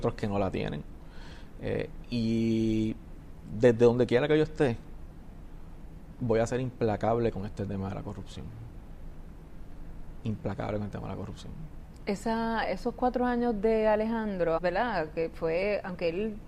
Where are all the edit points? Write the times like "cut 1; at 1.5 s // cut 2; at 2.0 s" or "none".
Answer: cut 1; at 12.6 s // cut 2; at 14.6 s